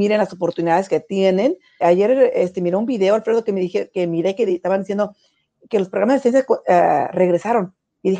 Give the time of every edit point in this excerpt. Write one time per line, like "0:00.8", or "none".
0:01.8